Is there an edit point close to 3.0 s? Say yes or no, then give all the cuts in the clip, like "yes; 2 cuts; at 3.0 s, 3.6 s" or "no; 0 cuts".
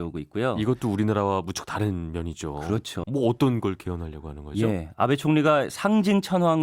yes; 1 cut; at 3.0 s